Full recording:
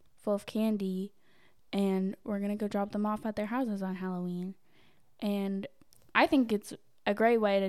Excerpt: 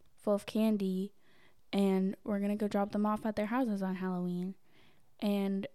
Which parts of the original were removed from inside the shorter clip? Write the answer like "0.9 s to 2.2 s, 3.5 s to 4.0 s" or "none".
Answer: none